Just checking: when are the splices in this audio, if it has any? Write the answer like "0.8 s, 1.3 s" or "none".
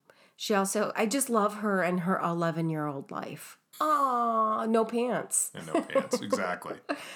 0.9 s, 3.7 s